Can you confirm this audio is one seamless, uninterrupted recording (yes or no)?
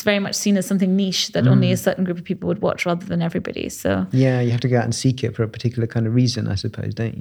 yes